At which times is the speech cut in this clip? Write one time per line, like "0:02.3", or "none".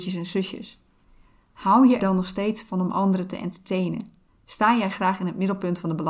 0:02.0